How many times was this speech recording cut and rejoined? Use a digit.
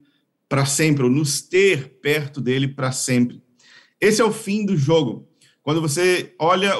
0